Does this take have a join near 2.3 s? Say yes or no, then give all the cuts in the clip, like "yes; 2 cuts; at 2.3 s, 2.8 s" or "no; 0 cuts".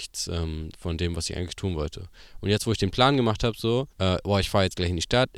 no; 1 cut; at 3.9 s